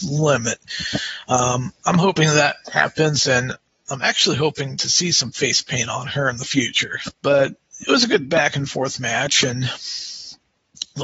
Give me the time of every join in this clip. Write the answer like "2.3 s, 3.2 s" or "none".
7.1 s

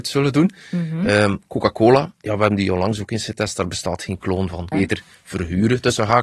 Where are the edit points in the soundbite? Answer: 2.1 s, 4.7 s

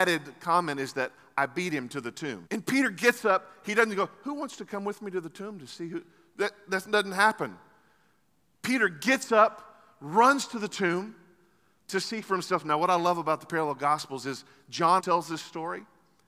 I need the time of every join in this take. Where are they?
2.5 s, 15.0 s

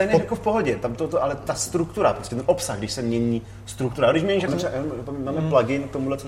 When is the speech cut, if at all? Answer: 4.5 s

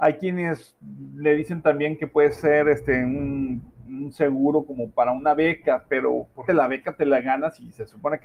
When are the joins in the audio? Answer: 6.5 s

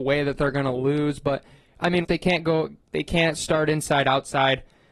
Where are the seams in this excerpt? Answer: 2.0 s

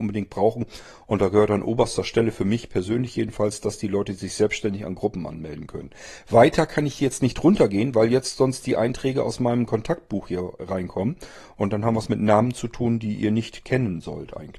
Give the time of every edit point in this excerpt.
none

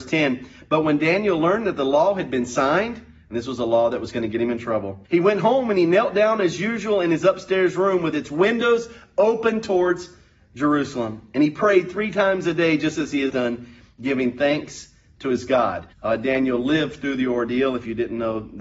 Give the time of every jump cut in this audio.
5.0 s, 13.3 s, 15.9 s

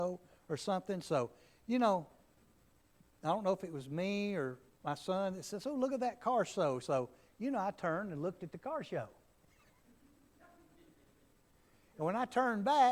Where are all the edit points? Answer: none

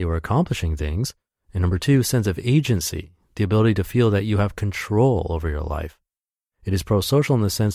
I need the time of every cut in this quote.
6.5 s

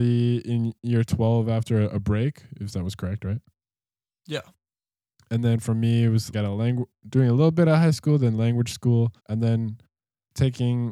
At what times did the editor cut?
6.3 s, 9.2 s

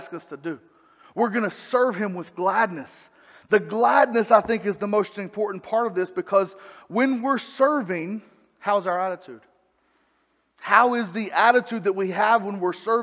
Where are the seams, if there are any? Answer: none

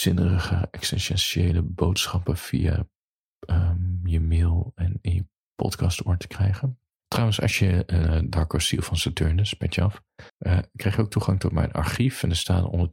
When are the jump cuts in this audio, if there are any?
8.0 s, 10.3 s

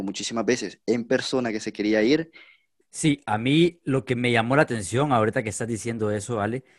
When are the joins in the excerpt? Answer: 2.8 s

